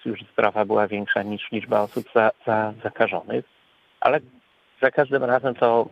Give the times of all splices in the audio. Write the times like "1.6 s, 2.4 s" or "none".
none